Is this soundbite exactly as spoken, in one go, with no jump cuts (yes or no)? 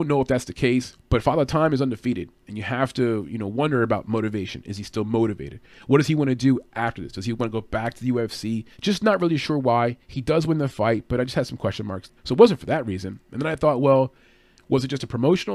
no